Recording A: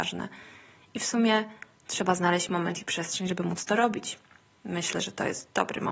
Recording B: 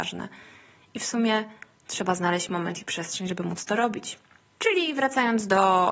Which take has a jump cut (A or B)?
B